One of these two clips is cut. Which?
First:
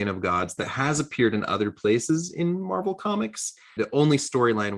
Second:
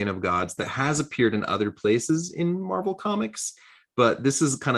first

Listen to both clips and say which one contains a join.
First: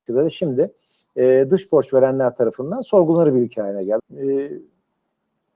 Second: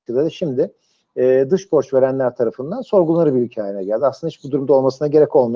first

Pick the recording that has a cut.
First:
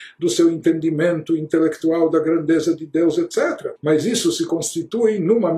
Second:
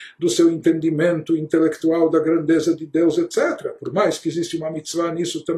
first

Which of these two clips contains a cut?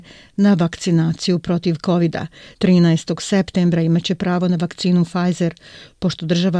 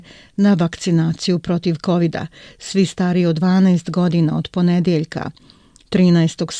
first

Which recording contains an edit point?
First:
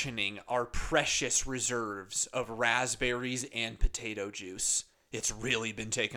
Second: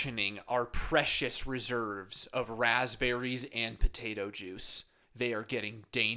first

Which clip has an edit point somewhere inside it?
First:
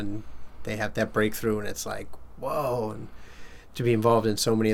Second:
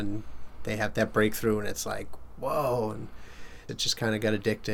second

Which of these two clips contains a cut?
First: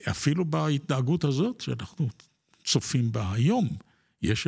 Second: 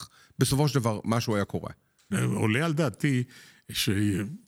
second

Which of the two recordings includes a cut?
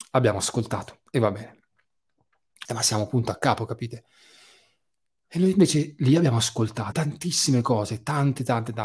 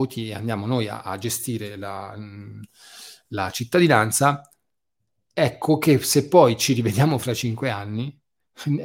first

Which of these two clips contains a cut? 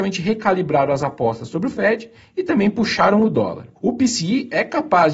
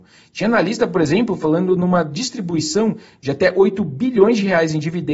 first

